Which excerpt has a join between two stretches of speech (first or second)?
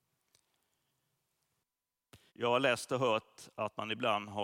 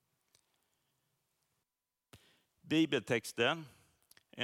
first